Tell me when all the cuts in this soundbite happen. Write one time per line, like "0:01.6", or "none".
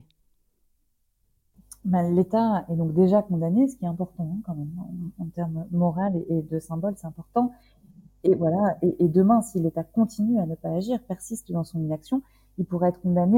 none